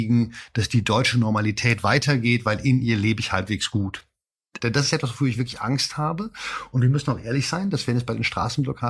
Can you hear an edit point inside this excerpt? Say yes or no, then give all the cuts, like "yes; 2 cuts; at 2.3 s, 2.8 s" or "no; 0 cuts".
yes; 1 cut; at 4.6 s